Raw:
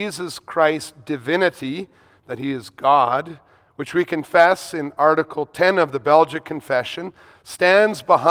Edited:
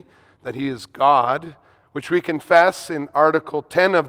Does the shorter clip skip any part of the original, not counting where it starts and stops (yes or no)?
no